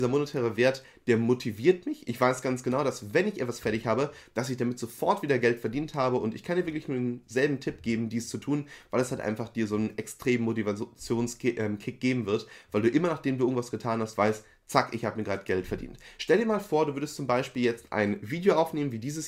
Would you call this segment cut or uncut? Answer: uncut